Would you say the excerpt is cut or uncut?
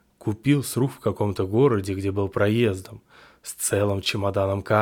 uncut